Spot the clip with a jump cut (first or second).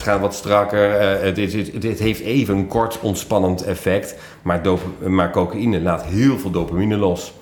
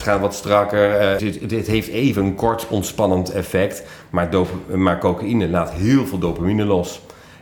second